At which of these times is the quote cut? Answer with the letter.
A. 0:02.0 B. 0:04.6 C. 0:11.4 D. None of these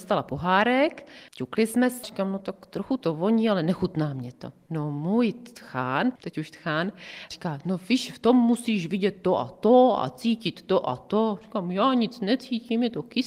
A